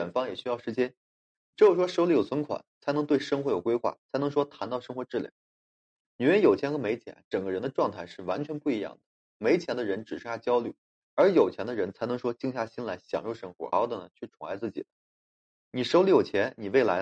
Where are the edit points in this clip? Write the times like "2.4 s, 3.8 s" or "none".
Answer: 13.7 s